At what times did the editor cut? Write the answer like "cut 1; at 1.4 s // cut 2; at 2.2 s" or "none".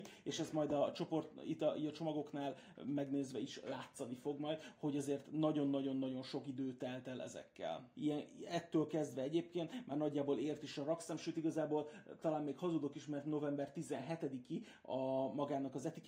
cut 1; at 7.9 s